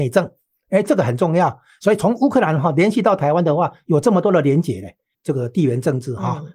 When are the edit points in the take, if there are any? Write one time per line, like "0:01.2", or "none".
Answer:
0:05.1